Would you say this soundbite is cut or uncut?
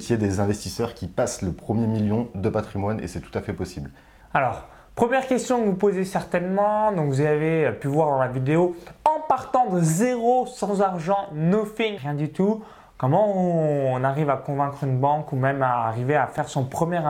cut